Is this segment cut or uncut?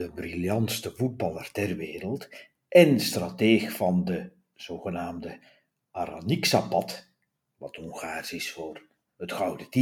uncut